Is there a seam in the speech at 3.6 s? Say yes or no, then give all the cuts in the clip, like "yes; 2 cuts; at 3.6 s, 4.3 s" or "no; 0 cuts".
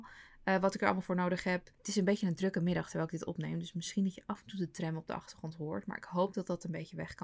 no; 1 cut; at 1.7 s